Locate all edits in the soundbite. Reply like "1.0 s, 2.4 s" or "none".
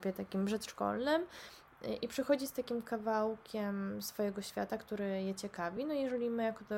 none